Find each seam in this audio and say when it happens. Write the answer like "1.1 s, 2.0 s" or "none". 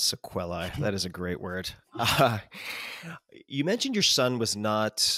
none